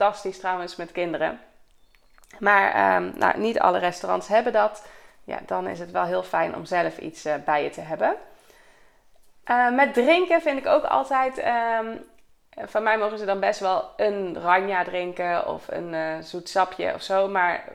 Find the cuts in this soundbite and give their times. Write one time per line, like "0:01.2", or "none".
none